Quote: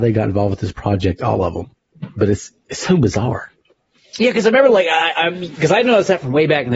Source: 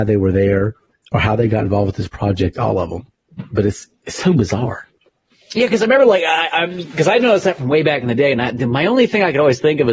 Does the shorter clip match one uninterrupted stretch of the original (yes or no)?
yes